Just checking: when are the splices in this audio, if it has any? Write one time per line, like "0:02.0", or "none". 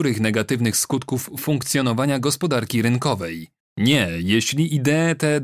0:03.6